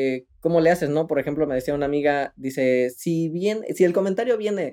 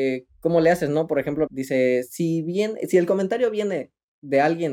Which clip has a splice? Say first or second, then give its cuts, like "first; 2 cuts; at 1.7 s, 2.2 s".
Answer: second; 1 cut; at 1.5 s